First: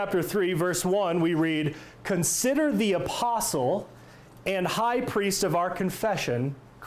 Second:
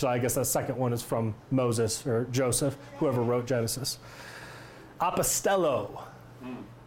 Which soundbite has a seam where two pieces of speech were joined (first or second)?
second